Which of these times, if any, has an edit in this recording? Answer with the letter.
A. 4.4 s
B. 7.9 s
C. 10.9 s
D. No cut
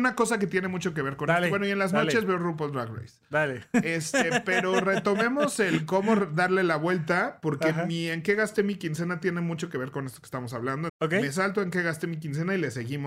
C